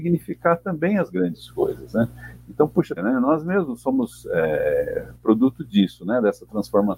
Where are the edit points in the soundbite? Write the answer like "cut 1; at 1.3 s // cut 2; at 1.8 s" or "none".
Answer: cut 1; at 3.0 s